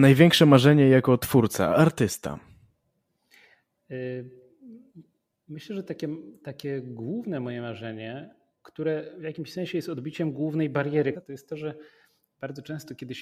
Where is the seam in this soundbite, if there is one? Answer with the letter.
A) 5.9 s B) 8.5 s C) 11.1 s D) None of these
C